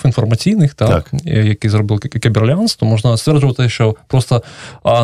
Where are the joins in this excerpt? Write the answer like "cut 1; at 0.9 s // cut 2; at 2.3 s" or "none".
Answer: none